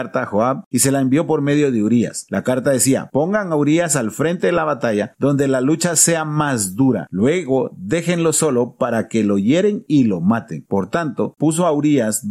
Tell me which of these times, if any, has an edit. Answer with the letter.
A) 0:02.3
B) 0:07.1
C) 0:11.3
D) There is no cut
C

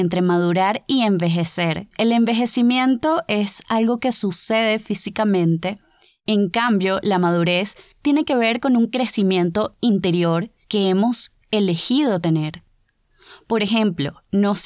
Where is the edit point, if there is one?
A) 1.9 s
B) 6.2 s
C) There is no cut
A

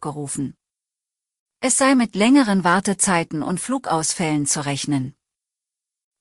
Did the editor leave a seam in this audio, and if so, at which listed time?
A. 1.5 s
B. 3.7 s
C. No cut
C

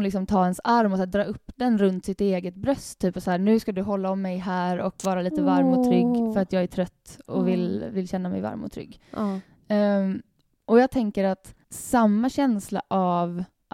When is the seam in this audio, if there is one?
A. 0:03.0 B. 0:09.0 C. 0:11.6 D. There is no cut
C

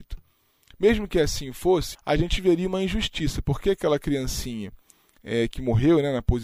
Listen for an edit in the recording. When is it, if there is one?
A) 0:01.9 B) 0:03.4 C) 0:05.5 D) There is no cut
A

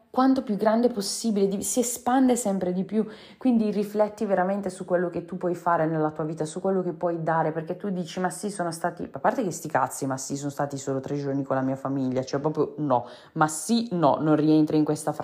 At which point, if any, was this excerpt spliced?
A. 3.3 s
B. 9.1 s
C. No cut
C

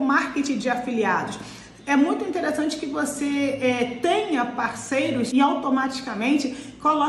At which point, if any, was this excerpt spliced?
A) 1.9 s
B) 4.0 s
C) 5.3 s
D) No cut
C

